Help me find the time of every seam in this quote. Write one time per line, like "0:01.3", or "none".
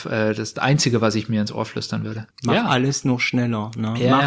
0:02.3